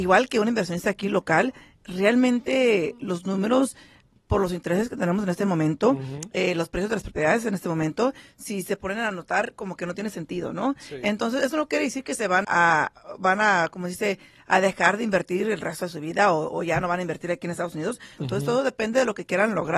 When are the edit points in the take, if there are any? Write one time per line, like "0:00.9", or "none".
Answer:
0:12.4
0:18.2